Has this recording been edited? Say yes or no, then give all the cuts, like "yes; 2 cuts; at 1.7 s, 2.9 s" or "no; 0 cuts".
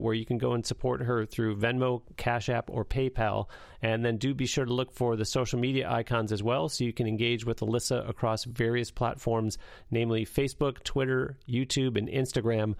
no; 0 cuts